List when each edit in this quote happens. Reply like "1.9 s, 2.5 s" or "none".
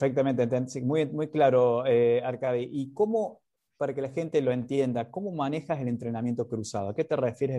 none